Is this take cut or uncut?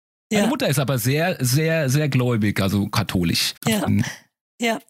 cut